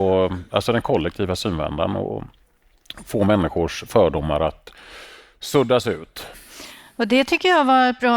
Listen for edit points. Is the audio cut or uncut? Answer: uncut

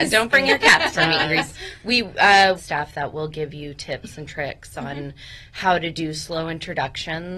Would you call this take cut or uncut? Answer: cut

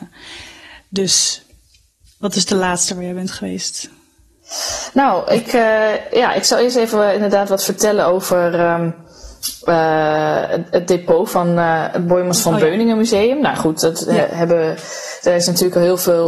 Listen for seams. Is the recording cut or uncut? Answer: uncut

